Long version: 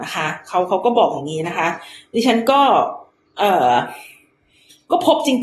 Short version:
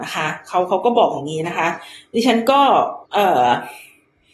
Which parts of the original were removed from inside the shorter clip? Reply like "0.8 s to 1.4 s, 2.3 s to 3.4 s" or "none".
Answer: 3.0 s to 3.3 s